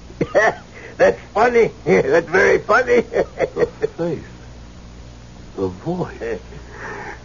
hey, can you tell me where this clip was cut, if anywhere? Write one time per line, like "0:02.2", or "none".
none

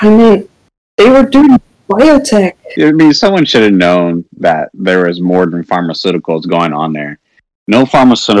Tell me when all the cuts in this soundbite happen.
0:02.8

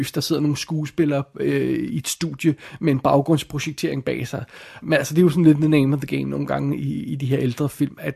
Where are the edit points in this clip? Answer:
0:04.8

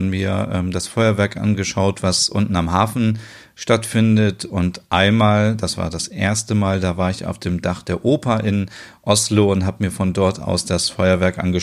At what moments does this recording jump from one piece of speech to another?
none

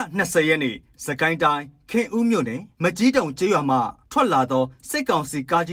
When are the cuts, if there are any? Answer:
none

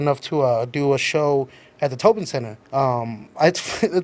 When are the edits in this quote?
0:02.6

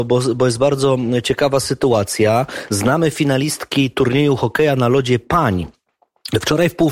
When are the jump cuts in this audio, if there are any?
none

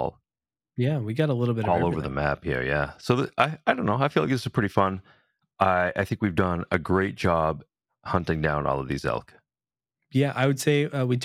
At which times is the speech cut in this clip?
none

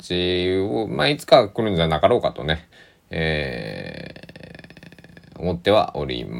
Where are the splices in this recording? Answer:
none

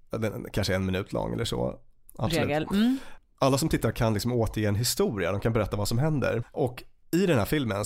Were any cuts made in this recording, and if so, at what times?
0:02.1
0:06.4

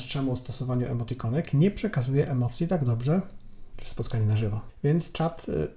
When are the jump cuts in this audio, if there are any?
0:03.7

